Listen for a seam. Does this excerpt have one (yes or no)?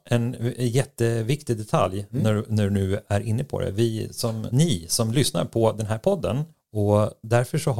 yes